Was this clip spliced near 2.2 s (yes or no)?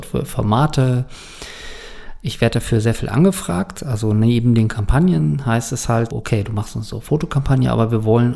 no